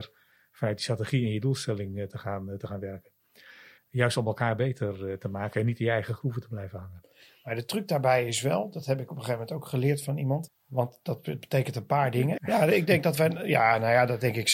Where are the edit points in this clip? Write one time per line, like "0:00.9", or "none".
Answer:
0:03.8
0:10.5
0:12.4